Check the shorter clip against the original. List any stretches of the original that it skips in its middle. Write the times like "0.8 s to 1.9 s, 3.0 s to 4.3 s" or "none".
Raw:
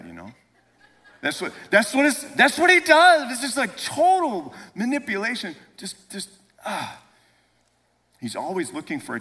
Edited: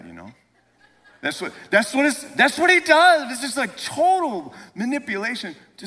none